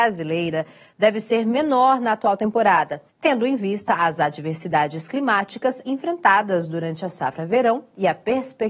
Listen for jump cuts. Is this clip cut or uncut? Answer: cut